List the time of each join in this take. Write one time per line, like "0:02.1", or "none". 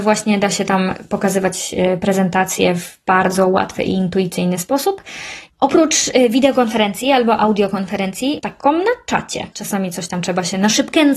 0:05.5
0:08.4
0:09.5